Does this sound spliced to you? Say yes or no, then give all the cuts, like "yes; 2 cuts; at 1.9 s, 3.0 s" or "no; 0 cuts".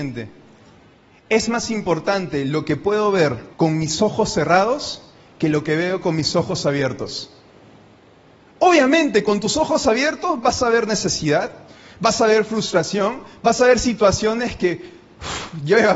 yes; 1 cut; at 3.5 s